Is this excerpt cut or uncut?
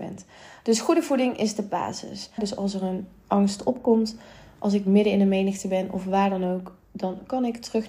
cut